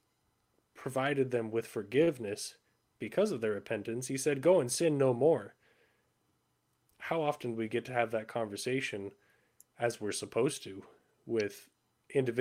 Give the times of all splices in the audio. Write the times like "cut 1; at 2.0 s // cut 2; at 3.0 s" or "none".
none